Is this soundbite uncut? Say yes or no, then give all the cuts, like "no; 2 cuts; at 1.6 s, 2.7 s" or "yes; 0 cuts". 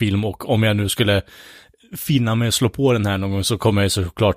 yes; 0 cuts